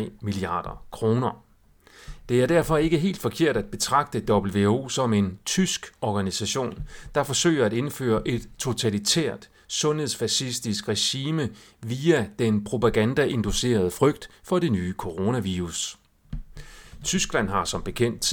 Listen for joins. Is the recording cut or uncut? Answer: uncut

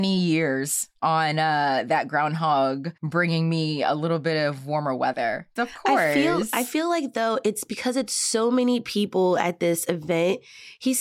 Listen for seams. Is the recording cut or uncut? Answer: cut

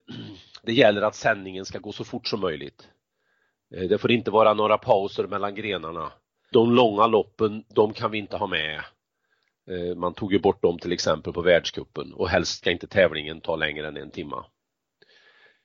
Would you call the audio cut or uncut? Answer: cut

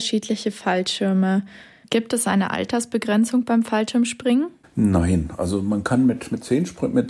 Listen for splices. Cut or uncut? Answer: cut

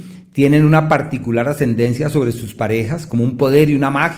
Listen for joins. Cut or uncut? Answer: uncut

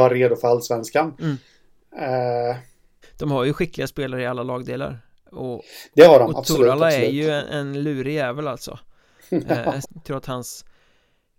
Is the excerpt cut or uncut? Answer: cut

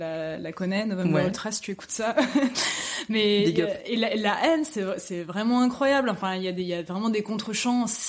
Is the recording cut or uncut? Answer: uncut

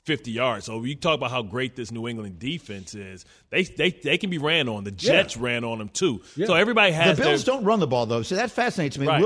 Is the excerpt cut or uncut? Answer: uncut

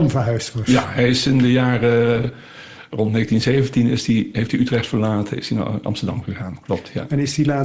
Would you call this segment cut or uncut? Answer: uncut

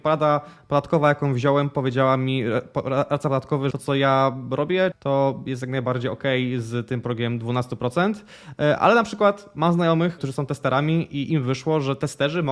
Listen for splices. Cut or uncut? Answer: cut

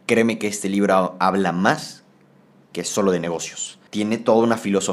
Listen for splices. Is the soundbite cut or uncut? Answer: cut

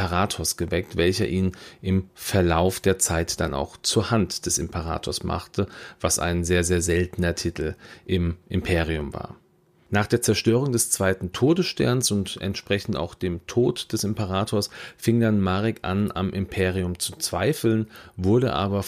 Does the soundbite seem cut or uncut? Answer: uncut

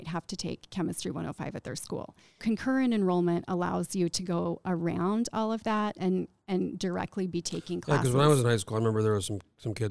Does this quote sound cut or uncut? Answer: cut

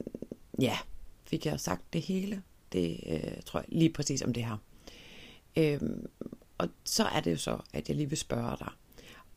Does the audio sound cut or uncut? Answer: uncut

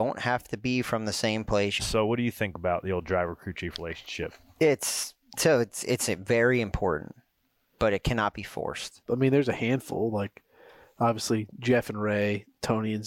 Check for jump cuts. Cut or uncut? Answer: cut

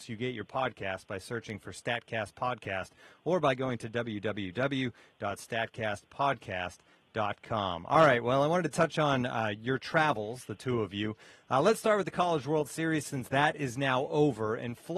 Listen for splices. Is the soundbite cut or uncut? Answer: uncut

